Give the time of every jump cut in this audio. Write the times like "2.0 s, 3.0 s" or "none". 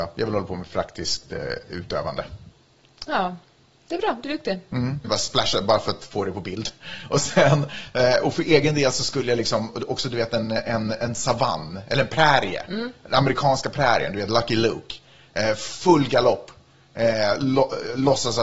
5.0 s

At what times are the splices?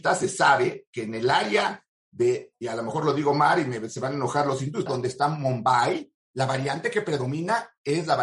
4.9 s, 6.3 s

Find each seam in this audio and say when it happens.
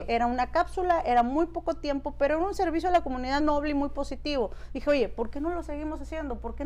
3.4 s

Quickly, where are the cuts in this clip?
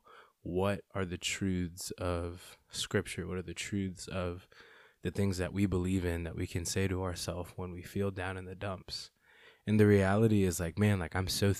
none

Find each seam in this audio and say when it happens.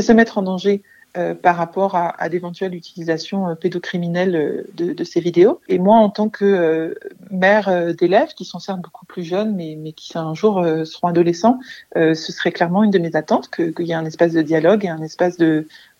5.7 s

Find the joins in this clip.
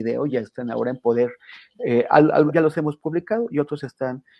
2.5 s

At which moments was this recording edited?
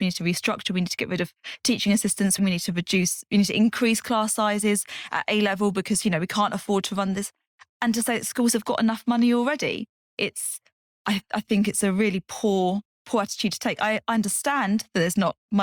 2.4 s

